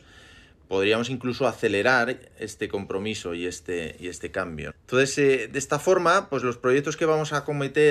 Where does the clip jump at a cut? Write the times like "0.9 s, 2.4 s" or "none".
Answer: 4.7 s